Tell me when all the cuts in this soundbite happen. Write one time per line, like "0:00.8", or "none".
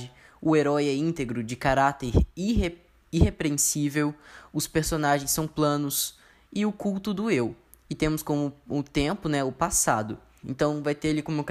0:10.4